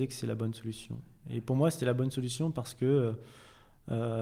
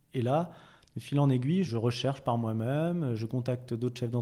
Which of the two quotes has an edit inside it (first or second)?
second